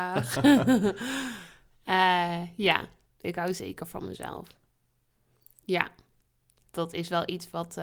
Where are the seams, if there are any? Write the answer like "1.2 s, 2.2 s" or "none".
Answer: none